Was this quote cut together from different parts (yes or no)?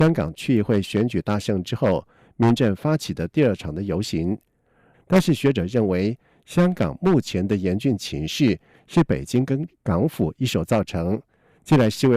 yes